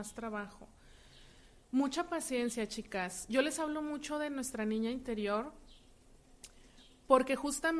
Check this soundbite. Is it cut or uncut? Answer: uncut